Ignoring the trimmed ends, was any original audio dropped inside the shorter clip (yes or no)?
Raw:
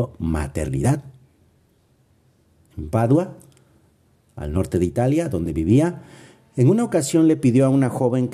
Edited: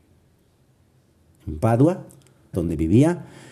yes